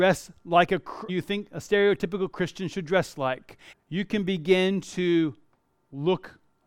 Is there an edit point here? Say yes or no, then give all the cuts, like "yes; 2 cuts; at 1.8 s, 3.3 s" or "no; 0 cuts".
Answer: yes; 2 cuts; at 1.1 s, 3.7 s